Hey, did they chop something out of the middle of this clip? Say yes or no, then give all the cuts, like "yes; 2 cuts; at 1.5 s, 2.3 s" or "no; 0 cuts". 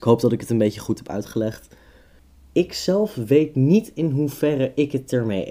no; 0 cuts